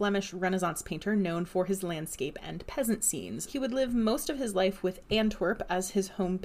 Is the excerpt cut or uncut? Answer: cut